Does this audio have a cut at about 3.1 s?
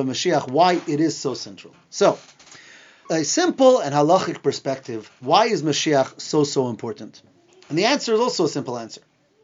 yes; 1 cut; at 3.1 s

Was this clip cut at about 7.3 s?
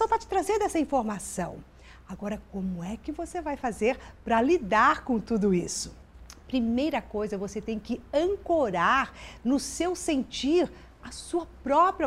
no; 1 cut; at 11.0 s

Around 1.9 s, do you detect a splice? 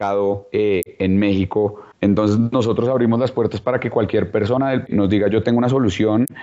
yes; 2 cuts; at 1.9 s, 4.9 s

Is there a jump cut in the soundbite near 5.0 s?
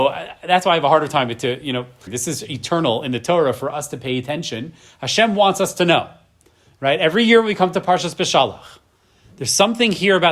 no; 1 cut; at 2.1 s

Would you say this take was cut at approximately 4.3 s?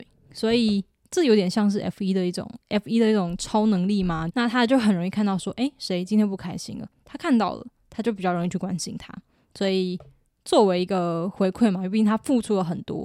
yes; 2 cuts; at 2.6 s, 4.3 s

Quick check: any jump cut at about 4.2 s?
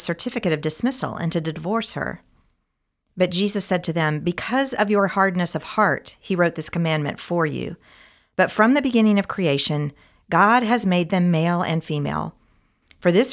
no; 0 cuts

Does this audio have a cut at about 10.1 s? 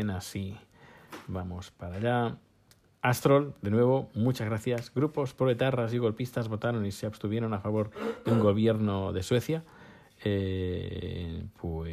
no; 0 cuts

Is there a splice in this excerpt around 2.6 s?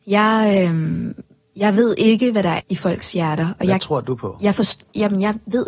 yes; 1 cut; at 2.6 s

